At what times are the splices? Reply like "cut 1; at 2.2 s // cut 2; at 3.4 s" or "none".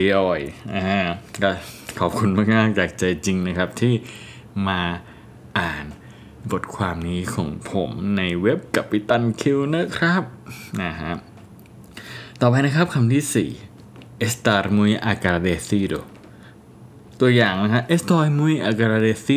cut 1; at 16.9 s